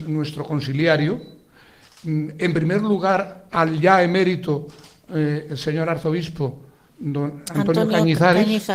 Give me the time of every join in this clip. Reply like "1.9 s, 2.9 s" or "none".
none